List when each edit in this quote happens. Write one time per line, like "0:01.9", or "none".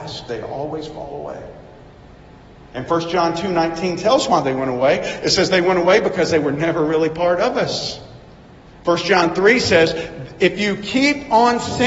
0:08.7